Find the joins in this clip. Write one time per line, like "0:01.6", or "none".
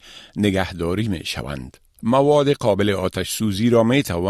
0:02.0

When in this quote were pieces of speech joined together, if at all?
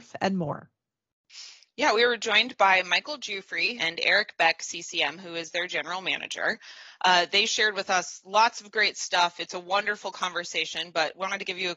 0:03.8

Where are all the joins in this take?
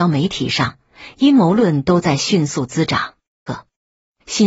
0:03.5

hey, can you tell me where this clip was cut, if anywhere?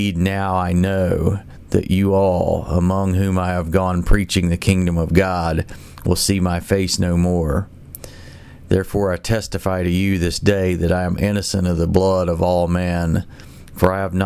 none

